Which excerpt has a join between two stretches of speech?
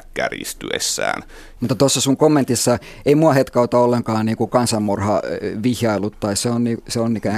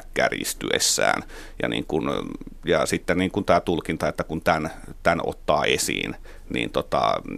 first; 1 cut; at 1.6 s

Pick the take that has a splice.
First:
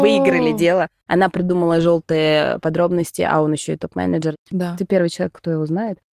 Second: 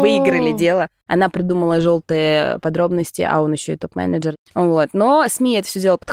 first; 1 cut; at 4.5 s

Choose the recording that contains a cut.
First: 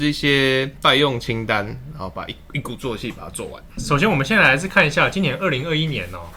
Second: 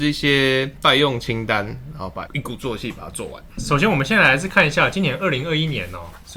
second; 1 cut; at 2.3 s

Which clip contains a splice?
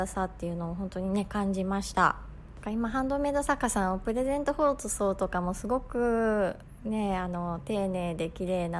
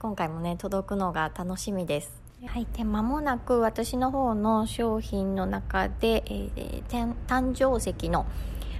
second; 1 cut; at 2.5 s

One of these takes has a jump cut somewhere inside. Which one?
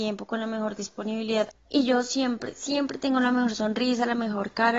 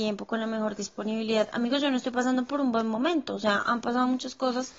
first; 1 cut; at 1.5 s

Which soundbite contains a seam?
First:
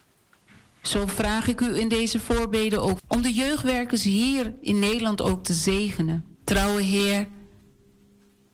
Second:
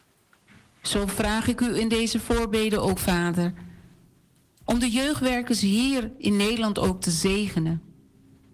first; 2 cuts; at 3.0 s, 6.3 s

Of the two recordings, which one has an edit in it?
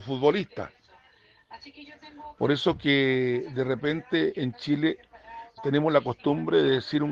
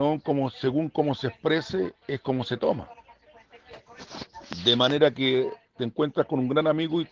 first; 1 cut; at 5.6 s

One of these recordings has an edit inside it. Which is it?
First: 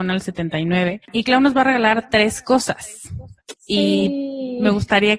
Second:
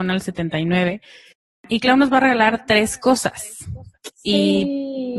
first; 1 cut; at 1.1 s

